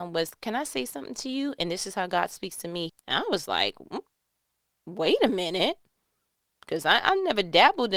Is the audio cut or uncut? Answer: cut